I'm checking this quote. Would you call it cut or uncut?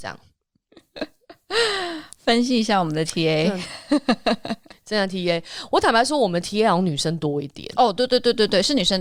uncut